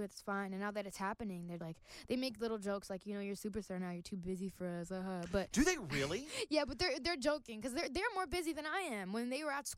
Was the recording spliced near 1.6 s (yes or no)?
yes